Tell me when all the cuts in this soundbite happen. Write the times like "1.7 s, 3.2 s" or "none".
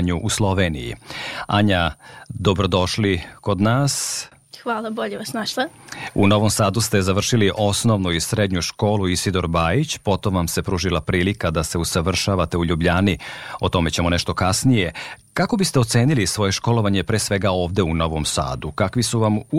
none